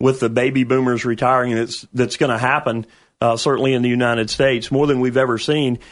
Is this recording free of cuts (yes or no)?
yes